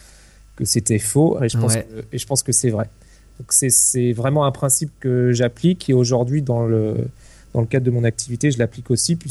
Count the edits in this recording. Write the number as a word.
one